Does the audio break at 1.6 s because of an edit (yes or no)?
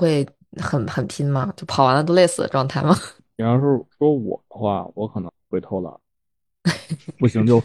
yes